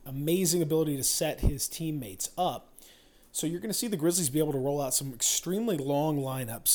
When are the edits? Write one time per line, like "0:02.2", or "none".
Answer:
none